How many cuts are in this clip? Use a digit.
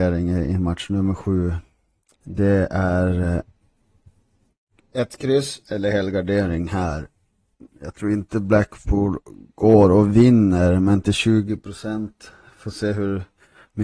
1